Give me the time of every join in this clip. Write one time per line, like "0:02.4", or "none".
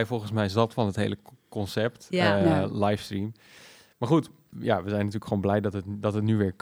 0:04.5

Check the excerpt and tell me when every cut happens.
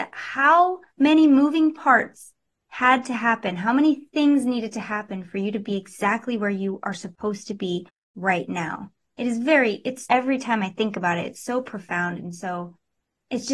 0:10.1

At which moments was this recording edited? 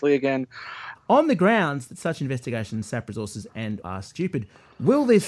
0:00.9
0:03.8

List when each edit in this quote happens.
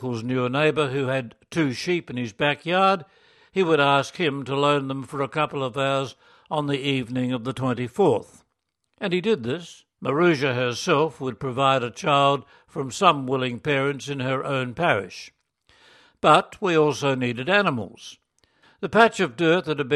0:10.0
0:18.6

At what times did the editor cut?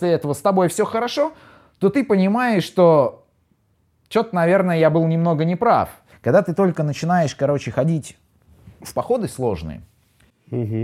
0:06.1

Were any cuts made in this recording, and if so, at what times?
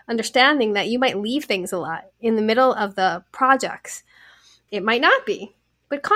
0:04.7

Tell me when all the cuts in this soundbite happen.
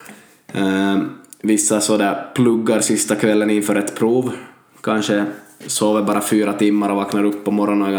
none

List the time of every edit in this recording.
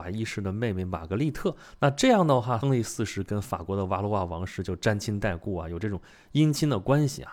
0:02.6

